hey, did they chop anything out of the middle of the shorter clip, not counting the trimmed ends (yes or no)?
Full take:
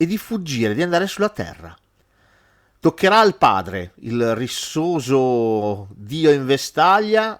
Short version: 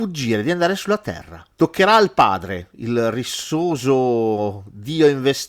yes